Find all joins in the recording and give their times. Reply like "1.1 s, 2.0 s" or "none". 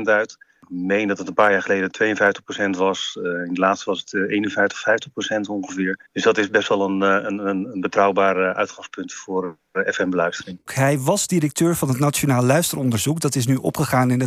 6.0 s, 10.7 s